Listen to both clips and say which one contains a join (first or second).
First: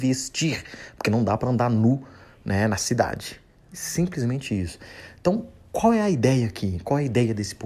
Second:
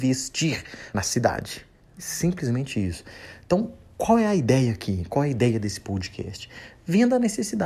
second